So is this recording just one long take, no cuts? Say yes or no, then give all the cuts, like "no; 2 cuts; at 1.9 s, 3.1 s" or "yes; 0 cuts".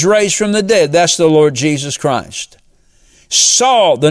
yes; 0 cuts